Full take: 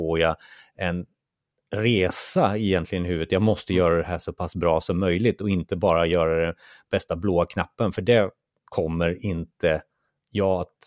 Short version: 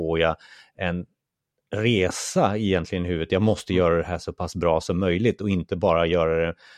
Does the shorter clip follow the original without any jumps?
yes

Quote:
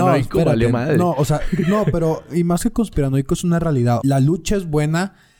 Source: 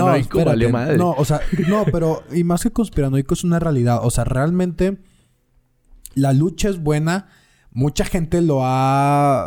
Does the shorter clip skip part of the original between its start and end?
yes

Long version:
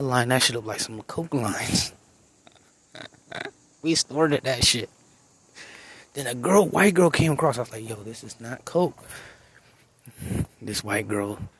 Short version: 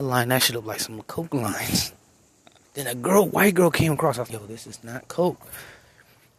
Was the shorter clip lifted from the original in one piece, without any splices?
no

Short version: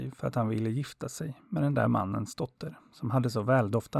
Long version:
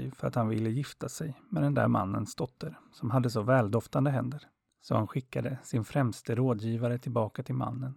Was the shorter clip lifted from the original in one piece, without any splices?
yes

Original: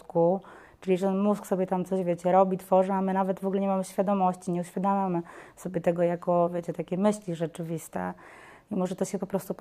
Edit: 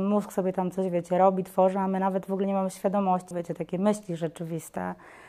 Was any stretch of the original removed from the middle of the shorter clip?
yes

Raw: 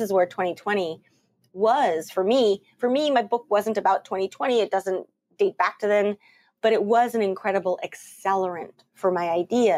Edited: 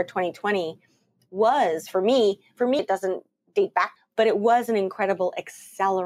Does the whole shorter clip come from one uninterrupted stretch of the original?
no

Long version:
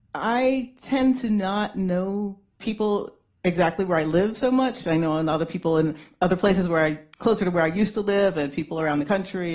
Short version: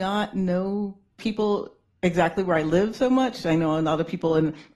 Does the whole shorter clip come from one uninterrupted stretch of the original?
yes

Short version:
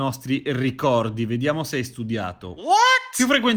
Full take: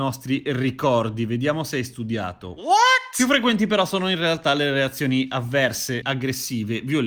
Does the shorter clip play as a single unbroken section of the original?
yes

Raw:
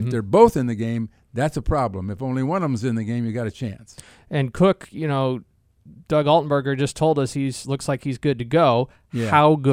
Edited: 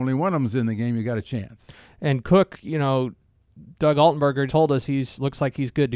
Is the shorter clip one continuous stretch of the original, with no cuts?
no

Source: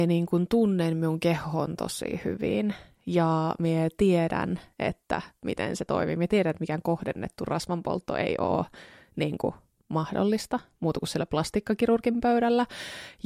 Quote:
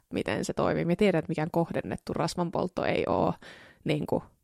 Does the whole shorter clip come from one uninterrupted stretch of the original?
yes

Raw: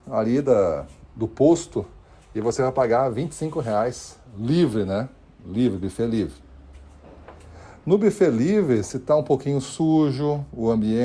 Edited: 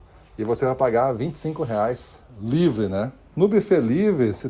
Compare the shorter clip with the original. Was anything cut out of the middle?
yes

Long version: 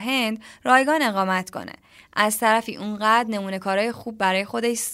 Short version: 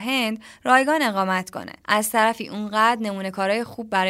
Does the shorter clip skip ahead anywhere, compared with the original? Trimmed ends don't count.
yes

